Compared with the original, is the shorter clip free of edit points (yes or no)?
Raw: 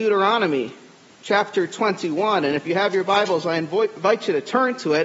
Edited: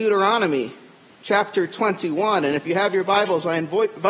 yes